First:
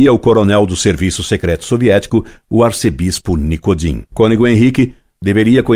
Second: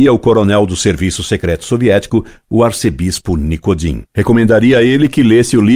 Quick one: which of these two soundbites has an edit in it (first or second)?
second